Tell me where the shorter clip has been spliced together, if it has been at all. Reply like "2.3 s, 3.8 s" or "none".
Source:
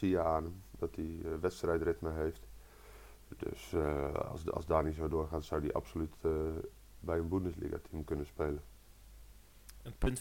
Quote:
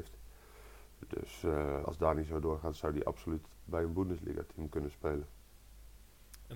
1.8 s, 3.5 s